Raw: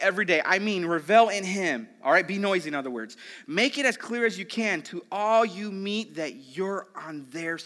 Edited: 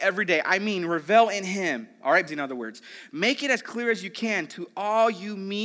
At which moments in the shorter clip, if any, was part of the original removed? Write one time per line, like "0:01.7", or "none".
0:02.3